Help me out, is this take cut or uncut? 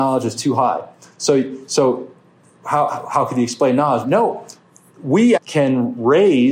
cut